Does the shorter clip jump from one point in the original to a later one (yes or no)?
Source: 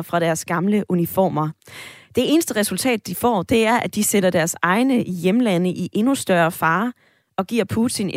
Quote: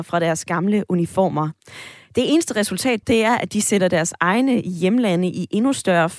yes